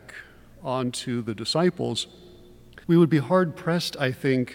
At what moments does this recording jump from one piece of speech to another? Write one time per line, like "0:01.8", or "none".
0:02.8

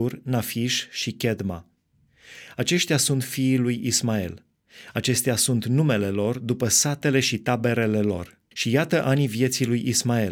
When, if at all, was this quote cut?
0:08.5

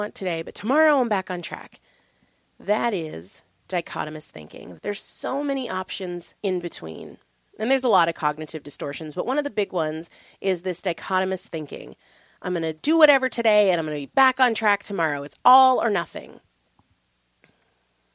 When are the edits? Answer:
0:04.8
0:06.4

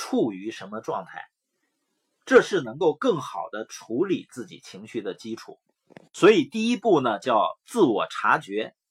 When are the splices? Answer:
none

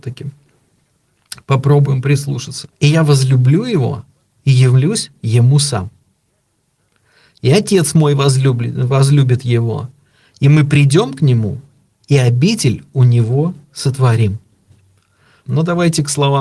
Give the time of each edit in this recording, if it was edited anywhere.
0:02.7
0:15.4

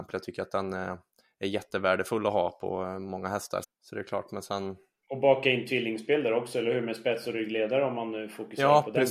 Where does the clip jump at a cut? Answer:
0:03.6

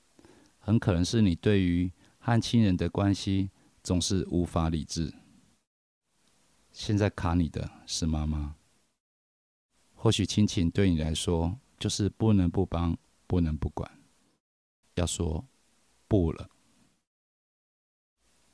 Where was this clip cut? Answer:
0:06.6
0:14.8

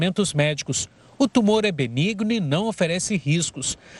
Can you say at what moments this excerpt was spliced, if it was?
none

